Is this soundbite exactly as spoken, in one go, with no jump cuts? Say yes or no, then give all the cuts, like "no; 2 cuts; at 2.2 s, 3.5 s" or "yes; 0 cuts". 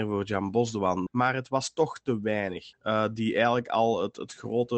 no; 2 cuts; at 1.1 s, 2.7 s